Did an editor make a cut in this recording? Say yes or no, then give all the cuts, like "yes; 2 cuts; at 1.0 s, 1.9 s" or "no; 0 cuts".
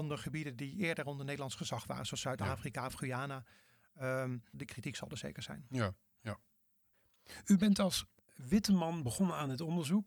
yes; 1 cut; at 4.5 s